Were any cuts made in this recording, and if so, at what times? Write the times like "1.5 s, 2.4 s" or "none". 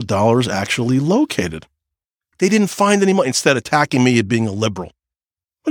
2.3 s